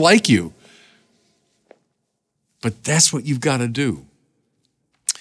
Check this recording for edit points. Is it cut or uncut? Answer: uncut